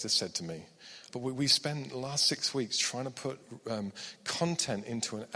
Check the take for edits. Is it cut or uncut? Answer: cut